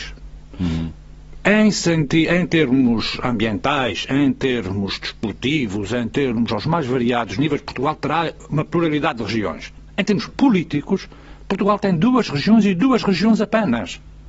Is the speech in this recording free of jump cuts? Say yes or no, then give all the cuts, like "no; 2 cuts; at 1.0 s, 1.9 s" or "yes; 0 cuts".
yes; 0 cuts